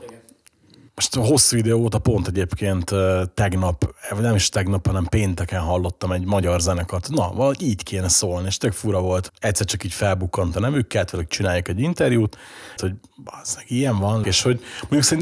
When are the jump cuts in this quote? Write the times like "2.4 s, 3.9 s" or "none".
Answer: 9.3 s, 12.8 s, 14.2 s